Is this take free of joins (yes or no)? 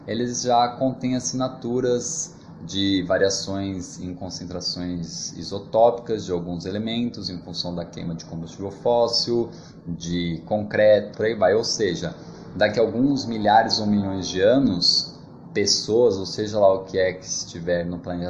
no